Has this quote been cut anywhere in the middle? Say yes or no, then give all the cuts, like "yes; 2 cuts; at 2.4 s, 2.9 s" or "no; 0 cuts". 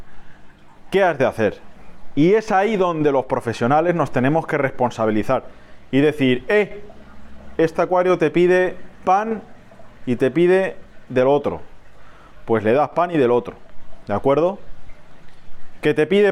no; 0 cuts